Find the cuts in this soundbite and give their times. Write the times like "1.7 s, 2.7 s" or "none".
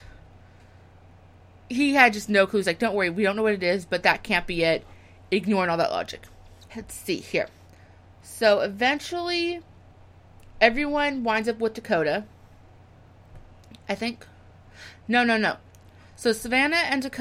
6.7 s